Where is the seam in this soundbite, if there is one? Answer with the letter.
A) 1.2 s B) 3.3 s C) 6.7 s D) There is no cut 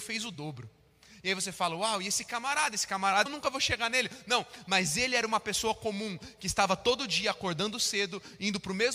B